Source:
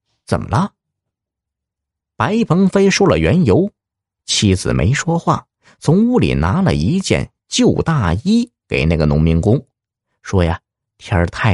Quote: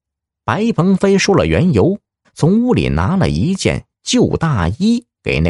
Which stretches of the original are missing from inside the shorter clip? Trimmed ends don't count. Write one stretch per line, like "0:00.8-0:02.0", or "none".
0:04.0-0:05.7